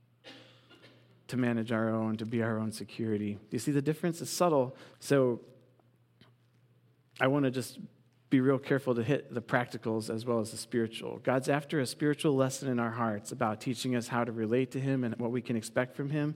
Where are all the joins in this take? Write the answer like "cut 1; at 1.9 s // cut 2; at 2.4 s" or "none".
cut 1; at 4.9 s